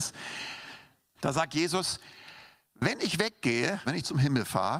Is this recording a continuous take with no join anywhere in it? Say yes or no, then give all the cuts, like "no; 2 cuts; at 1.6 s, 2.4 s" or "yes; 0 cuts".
no; 2 cuts; at 1.2 s, 3.9 s